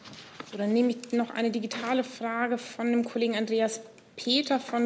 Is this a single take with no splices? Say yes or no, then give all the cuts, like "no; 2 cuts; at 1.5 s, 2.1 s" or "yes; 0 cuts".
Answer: no; 1 cut; at 1.1 s